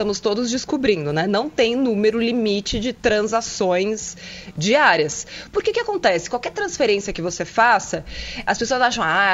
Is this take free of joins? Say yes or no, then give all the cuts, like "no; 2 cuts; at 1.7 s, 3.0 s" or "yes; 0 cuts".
no; 1 cut; at 3.0 s